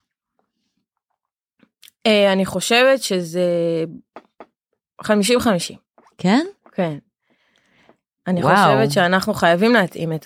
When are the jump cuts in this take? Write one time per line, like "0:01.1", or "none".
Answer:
none